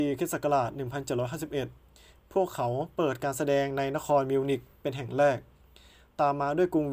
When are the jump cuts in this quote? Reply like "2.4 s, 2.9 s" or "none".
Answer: none